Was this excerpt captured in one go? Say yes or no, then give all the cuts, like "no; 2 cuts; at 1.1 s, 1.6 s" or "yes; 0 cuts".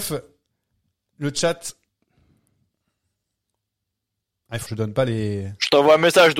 no; 1 cut; at 4.7 s